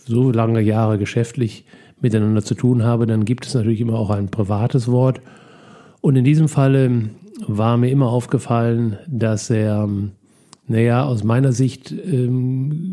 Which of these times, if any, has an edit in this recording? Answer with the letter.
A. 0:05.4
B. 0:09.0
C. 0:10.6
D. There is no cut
D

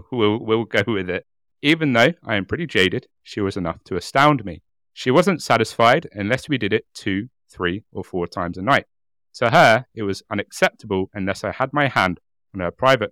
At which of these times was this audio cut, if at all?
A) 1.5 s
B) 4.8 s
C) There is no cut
A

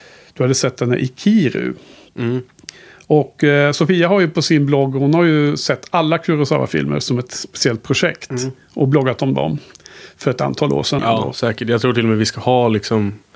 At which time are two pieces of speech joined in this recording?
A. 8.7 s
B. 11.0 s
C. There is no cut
B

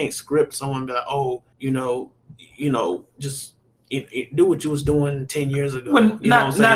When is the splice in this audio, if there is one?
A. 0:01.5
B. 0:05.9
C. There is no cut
A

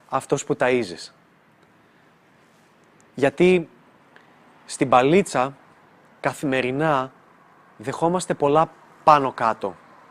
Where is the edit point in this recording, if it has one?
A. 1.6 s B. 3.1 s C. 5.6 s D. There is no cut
D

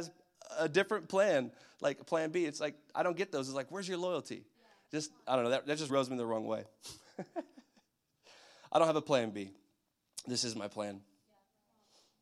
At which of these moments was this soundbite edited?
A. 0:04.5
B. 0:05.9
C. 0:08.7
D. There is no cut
B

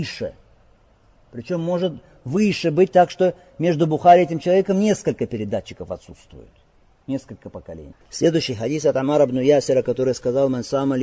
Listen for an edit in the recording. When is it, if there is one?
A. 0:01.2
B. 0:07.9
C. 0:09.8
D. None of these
B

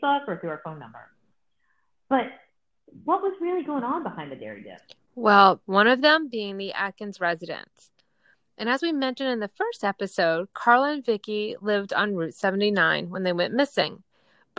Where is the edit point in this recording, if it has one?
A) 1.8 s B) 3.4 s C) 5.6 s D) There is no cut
C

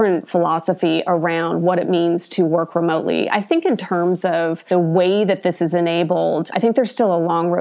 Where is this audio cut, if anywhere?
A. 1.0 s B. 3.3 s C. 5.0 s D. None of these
D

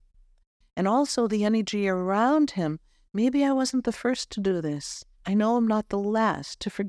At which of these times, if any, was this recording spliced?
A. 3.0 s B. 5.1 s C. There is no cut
B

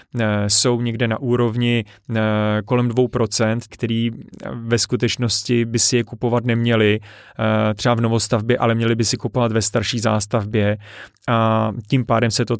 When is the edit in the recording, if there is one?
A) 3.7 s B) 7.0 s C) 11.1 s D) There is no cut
A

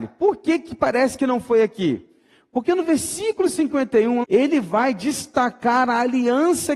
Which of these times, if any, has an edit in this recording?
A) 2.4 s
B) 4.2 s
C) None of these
B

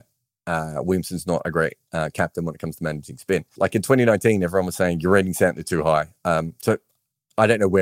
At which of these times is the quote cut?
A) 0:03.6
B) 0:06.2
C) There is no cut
A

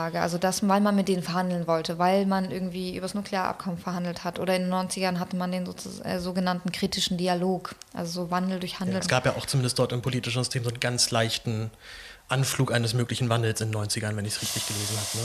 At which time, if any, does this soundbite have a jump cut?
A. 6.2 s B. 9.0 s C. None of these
B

